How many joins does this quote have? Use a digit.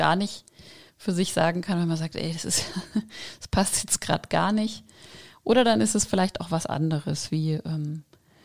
0